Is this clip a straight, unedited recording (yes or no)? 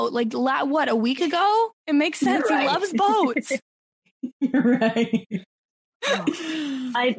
yes